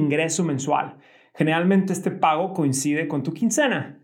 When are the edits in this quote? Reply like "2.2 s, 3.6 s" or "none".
none